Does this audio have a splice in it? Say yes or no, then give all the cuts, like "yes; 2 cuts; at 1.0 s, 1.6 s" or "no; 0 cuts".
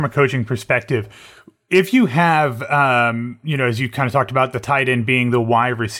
no; 0 cuts